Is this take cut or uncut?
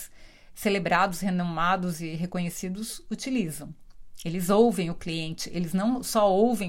uncut